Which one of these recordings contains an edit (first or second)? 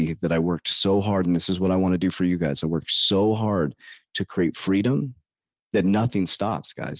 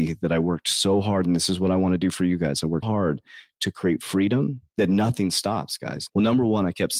second